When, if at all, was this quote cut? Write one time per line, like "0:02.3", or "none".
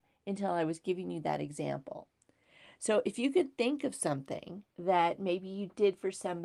0:04.7